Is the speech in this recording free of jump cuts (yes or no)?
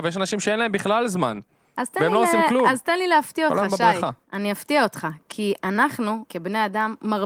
no